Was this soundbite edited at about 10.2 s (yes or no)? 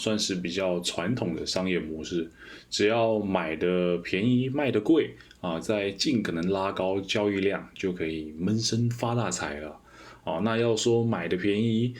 yes